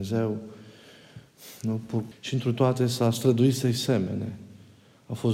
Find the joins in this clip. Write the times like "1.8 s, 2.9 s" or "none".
2.1 s